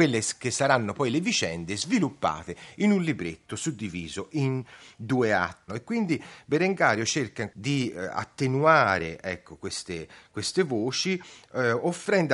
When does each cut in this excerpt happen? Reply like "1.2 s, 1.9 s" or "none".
5.7 s